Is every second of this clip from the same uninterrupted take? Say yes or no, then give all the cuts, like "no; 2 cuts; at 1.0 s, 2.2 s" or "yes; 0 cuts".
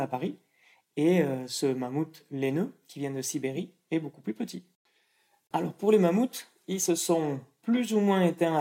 no; 1 cut; at 5.5 s